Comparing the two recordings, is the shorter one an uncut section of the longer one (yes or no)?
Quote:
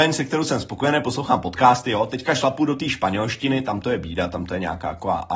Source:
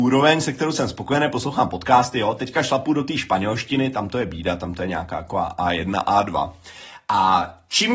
yes